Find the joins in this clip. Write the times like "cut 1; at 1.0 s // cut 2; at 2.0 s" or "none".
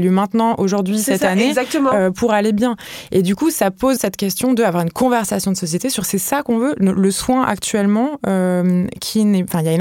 cut 1; at 4.0 s